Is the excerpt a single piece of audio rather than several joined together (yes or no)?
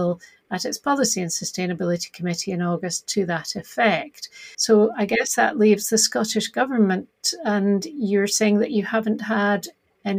no